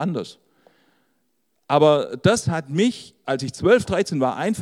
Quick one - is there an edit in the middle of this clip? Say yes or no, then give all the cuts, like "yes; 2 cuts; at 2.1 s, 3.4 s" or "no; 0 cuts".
yes; 1 cut; at 3.2 s